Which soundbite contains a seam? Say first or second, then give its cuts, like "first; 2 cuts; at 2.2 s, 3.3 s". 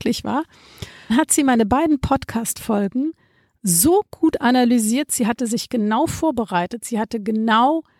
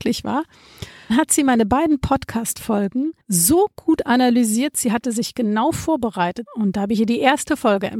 second; 2 cuts; at 3.2 s, 6.5 s